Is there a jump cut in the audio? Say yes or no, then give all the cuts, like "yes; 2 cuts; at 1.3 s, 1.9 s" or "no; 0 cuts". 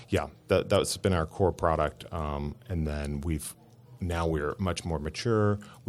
no; 0 cuts